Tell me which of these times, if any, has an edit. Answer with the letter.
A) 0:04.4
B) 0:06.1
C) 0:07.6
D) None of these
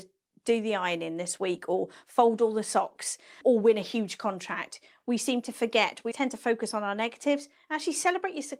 B